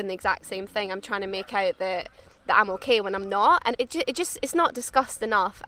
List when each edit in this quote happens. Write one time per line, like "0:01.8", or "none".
0:03.7

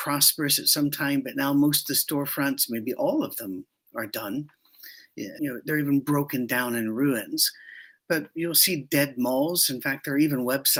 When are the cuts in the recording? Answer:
0:05.4

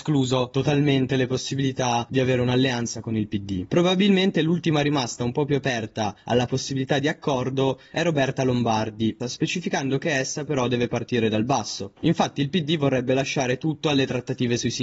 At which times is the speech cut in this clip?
0:09.2

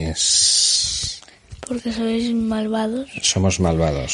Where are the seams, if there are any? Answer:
none

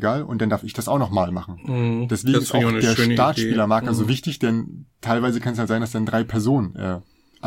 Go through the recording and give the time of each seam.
none

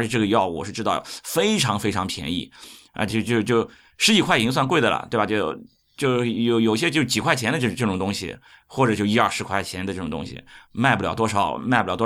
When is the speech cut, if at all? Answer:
none

